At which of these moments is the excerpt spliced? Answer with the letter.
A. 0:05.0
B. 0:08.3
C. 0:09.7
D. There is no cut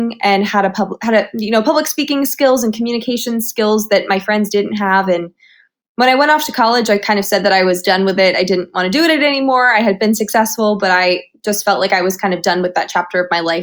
D